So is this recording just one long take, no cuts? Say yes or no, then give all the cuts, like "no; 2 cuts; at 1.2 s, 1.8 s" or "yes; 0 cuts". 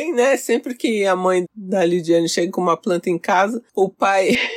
no; 1 cut; at 1.4 s